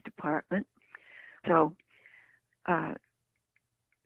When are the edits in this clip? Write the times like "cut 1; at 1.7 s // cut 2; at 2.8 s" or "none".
cut 1; at 1.4 s